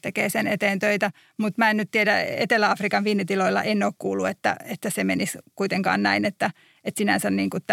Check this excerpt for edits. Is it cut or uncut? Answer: uncut